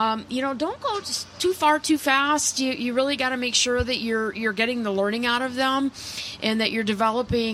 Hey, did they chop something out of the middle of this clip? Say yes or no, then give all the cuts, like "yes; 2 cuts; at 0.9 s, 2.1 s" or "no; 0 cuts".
no; 0 cuts